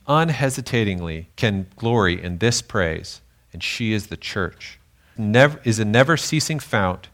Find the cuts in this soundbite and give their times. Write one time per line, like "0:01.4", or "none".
0:01.3
0:05.2